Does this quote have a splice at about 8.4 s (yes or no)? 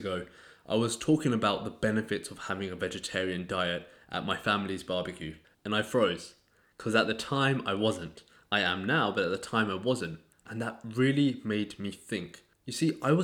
no